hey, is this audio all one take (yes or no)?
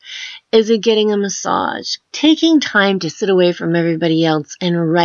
no